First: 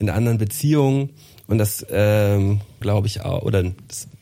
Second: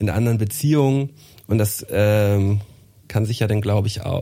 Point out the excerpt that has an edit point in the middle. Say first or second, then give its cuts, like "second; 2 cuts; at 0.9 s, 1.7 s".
first; 1 cut; at 2.8 s